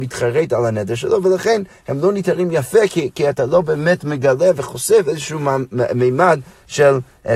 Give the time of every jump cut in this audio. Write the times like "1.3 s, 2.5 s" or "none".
none